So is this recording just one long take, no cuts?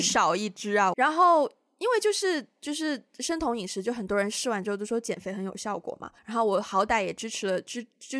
no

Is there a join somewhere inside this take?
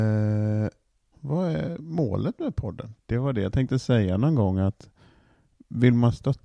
yes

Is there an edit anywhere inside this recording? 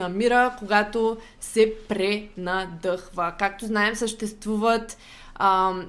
no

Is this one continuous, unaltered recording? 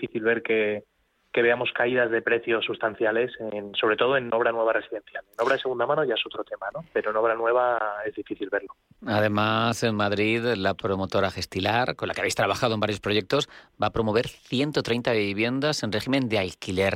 yes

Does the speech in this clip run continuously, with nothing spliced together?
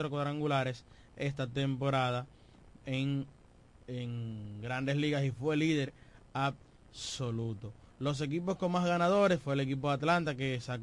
yes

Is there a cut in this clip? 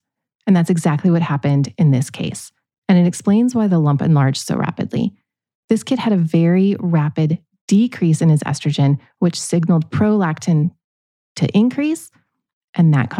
no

